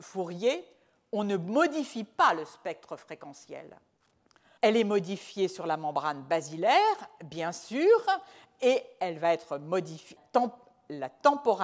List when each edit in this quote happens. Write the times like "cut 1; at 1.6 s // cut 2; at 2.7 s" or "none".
cut 1; at 4.6 s // cut 2; at 10.2 s